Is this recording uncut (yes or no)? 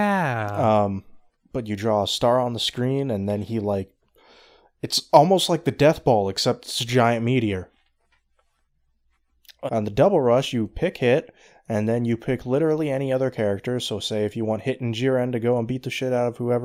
no